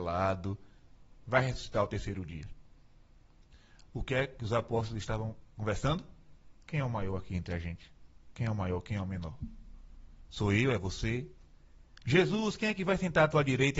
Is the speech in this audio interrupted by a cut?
no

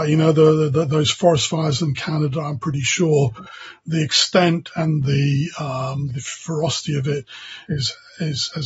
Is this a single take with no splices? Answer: no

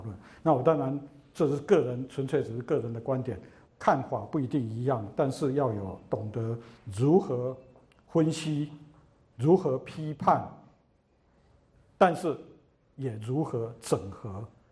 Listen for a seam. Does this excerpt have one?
yes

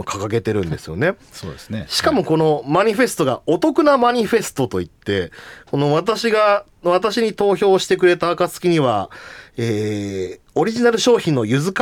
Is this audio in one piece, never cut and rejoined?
yes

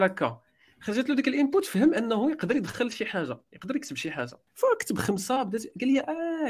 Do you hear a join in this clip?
yes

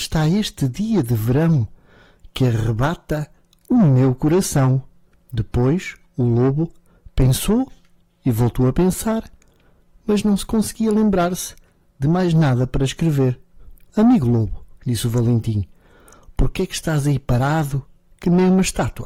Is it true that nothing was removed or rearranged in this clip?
yes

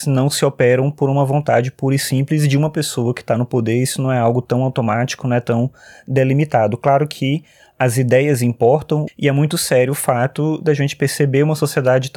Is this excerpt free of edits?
no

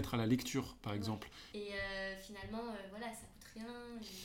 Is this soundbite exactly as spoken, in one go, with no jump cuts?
no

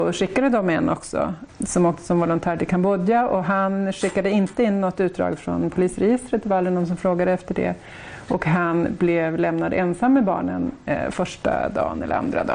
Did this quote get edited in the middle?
yes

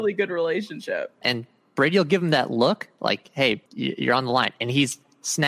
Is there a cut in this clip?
yes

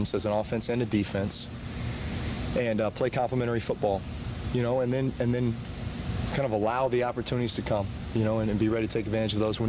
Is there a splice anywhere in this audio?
no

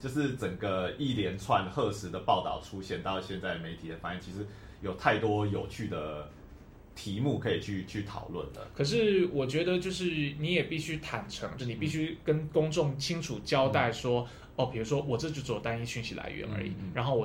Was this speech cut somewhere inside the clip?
yes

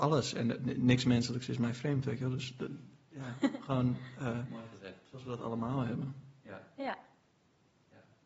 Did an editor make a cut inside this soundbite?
no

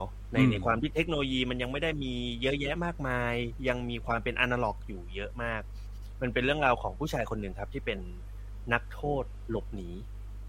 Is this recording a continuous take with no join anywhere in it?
yes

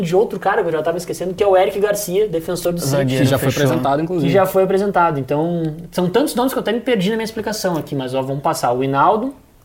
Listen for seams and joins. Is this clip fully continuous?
yes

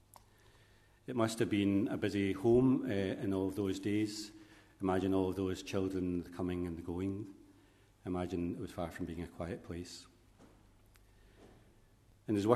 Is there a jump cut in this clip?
no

